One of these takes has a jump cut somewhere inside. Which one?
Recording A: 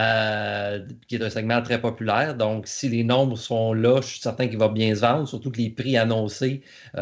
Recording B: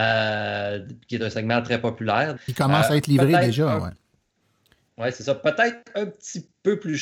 B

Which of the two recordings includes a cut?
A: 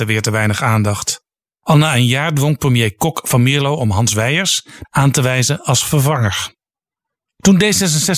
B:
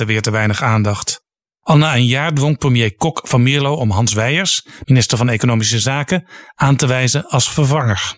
A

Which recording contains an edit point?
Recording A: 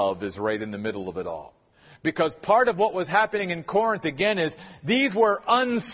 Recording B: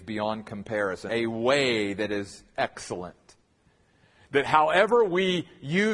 B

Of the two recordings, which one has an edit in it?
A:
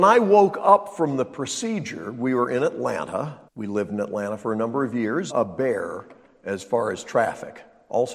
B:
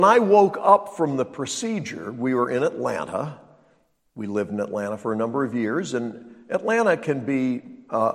A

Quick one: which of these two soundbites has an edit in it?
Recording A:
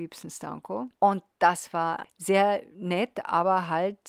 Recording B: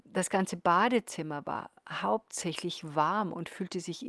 A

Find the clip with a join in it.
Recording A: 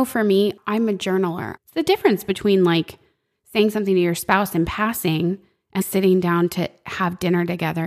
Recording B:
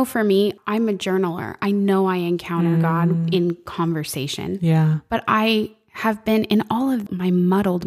A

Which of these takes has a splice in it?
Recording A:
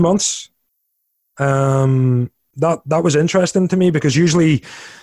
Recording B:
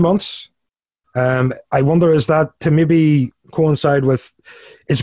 B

